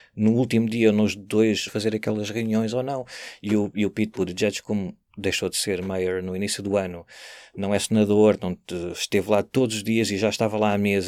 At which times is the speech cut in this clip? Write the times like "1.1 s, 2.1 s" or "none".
1.7 s